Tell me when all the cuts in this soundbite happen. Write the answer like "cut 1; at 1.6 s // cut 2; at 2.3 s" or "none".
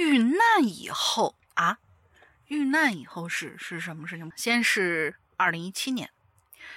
cut 1; at 4.3 s